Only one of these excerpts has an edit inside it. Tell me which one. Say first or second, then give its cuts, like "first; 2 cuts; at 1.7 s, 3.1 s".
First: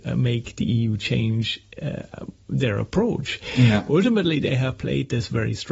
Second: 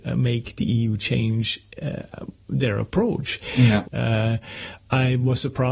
second; 1 cut; at 3.8 s